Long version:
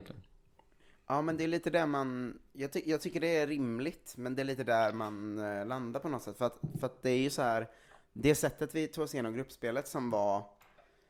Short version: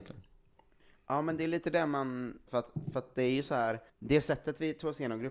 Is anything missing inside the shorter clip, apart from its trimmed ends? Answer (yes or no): yes